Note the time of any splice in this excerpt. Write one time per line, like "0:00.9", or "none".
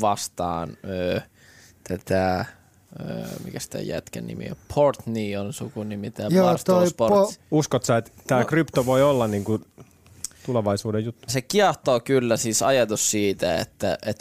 0:07.4
0:11.3